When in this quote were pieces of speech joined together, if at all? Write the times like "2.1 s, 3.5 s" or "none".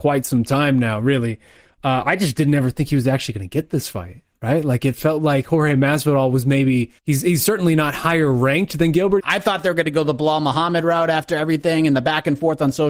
7.0 s, 9.2 s